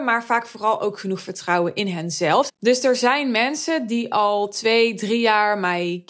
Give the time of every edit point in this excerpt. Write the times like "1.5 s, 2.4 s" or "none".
2.5 s